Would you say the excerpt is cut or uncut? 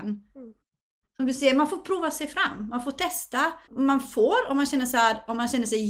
cut